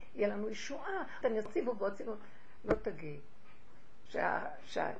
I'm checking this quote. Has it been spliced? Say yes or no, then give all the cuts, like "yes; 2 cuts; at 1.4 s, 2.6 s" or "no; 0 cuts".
yes; 2 cuts; at 1.2 s, 4.1 s